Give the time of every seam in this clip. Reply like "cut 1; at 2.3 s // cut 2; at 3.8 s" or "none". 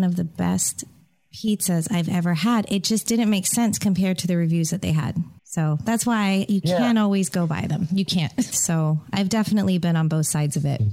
cut 1; at 5.4 s // cut 2; at 8.5 s